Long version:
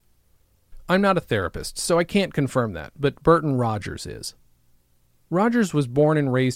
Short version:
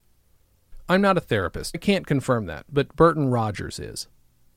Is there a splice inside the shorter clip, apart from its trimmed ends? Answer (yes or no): yes